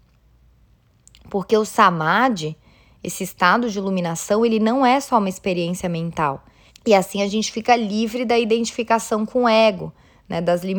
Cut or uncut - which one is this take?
cut